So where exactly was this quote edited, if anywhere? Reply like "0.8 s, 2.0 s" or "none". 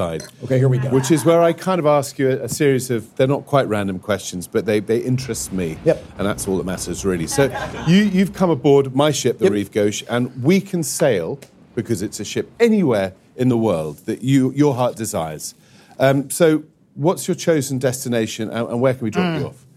none